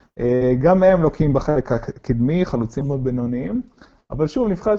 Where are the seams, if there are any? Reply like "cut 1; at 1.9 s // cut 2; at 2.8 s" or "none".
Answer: cut 1; at 2.8 s

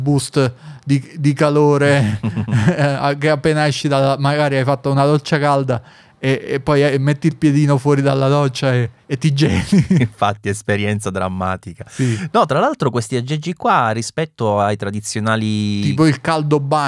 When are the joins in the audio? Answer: none

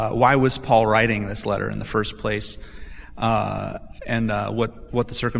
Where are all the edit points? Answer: none

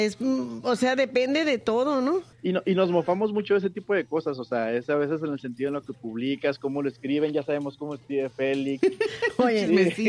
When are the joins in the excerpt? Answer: cut 1; at 8.8 s

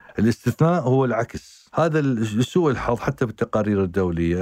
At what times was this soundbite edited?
cut 1; at 1.7 s

